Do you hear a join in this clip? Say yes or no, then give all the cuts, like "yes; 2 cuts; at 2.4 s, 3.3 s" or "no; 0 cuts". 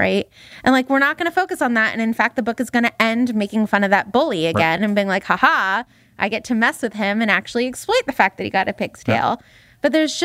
no; 0 cuts